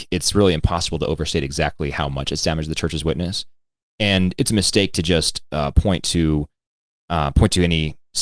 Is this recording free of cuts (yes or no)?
yes